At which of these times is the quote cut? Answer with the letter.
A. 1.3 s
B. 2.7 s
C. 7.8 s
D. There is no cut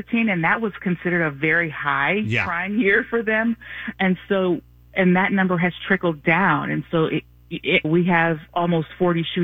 C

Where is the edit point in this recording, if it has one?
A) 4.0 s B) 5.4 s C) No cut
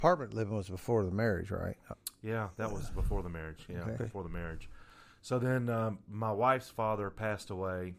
A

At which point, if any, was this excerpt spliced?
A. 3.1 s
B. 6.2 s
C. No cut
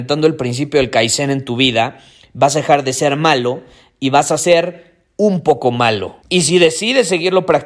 B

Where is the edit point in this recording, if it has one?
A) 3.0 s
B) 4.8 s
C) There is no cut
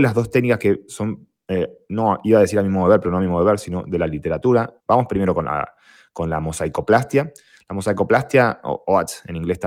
B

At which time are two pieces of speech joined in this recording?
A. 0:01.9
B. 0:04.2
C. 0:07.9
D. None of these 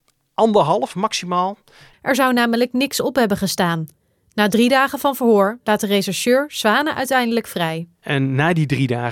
A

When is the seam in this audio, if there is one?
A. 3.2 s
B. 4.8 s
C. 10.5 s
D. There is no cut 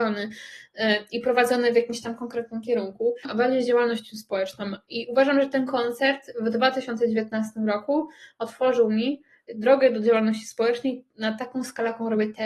A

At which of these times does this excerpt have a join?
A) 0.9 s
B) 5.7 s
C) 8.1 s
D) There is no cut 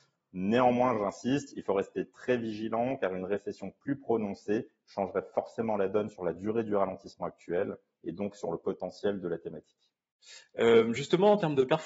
D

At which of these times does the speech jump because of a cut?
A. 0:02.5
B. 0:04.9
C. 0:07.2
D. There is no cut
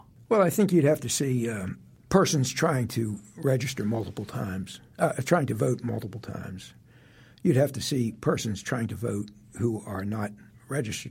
D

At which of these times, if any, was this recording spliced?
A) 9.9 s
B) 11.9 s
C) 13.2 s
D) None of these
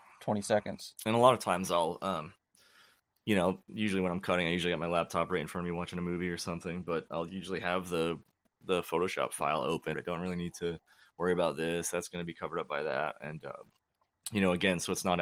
A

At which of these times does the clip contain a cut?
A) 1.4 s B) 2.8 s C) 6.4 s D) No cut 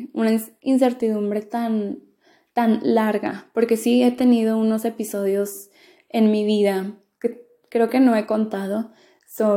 D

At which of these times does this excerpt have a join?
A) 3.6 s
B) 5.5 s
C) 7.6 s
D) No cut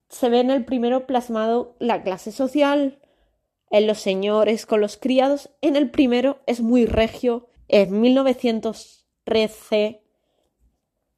C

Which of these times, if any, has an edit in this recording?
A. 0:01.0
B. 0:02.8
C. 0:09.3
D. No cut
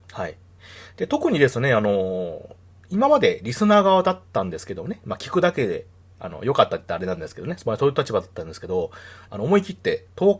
C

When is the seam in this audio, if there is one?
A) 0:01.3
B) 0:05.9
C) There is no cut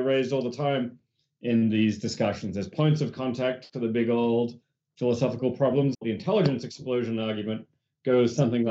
B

